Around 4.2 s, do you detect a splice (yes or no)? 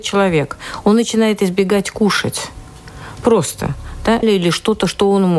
yes